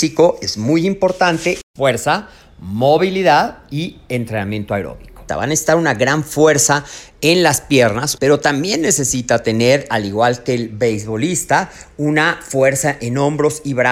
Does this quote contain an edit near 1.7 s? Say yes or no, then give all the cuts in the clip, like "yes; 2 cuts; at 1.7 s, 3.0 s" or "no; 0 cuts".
no; 2 cuts; at 5.3 s, 8.2 s